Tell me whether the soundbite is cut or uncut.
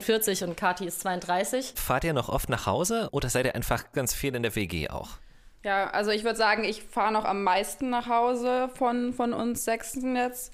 cut